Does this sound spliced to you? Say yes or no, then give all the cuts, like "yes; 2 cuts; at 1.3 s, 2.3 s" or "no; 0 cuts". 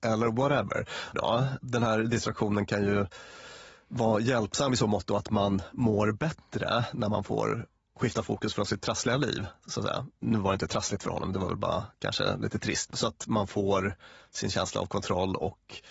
yes; 2 cuts; at 1.1 s, 12.8 s